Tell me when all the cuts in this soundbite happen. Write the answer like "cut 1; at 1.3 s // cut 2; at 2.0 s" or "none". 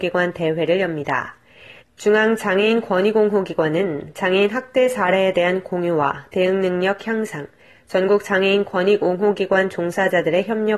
cut 1; at 1.8 s